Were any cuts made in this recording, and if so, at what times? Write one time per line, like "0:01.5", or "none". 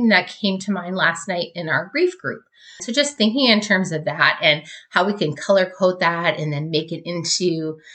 0:02.8